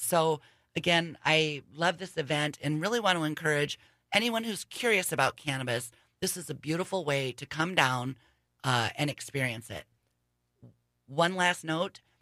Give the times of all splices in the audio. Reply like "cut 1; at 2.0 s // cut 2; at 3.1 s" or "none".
none